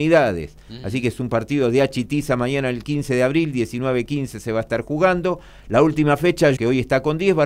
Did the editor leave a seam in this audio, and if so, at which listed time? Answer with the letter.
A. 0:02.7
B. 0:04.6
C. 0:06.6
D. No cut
C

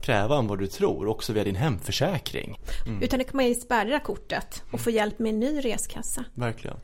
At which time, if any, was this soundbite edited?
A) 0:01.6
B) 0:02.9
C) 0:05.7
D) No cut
B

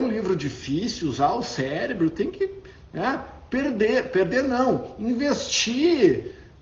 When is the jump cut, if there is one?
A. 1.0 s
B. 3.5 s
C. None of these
C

